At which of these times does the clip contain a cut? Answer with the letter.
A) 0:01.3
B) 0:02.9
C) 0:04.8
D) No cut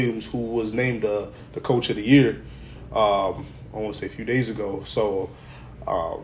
D